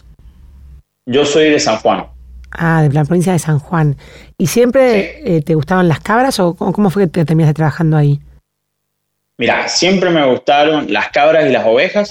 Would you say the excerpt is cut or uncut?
uncut